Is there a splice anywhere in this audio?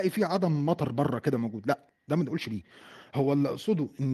no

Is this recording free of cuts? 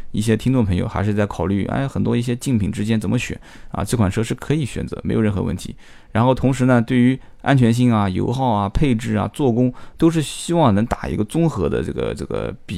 yes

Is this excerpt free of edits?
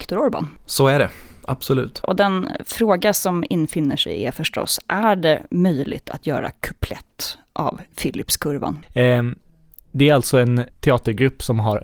no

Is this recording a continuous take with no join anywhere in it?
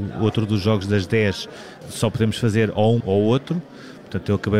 no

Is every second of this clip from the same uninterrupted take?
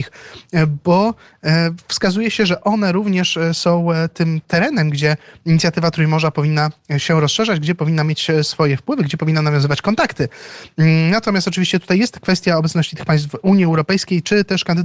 yes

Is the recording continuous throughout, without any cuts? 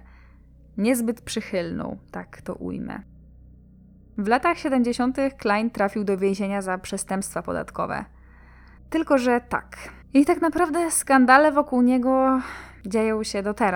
no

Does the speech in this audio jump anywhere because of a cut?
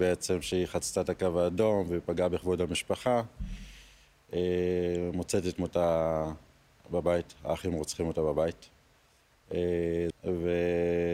yes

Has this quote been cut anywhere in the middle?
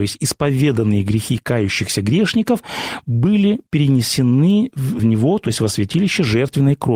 yes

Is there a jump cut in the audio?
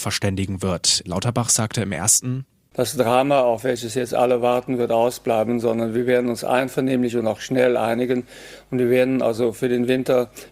yes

